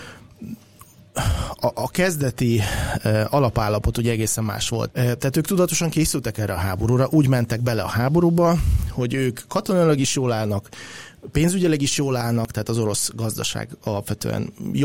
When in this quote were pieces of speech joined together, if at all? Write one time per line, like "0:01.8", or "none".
0:04.9